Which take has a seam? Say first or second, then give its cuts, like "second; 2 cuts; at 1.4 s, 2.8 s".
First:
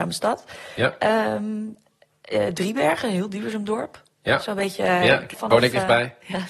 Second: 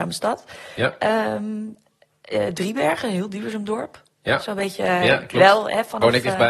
first; 1 cut; at 5.3 s